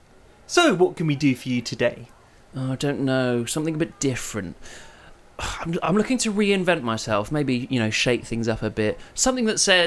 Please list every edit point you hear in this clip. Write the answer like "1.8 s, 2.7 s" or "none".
none

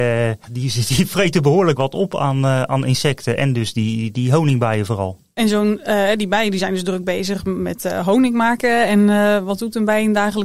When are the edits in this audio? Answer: 1.8 s

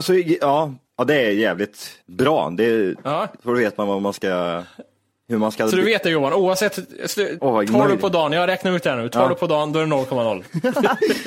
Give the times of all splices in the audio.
2.0 s, 3.4 s, 7.4 s

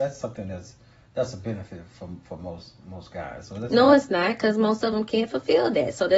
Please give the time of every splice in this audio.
none

